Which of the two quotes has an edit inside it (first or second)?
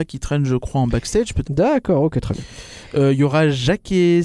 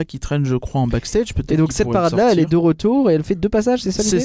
first